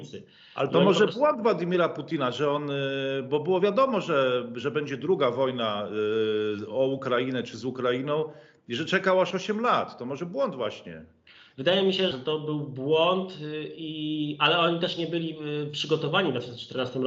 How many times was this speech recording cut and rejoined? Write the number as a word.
one